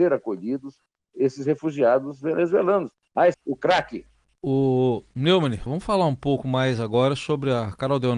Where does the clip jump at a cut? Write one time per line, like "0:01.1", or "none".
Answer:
0:03.3
0:05.7